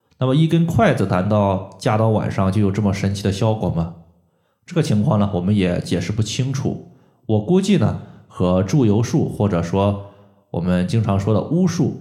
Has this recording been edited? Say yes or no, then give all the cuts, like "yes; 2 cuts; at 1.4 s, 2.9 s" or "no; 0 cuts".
no; 0 cuts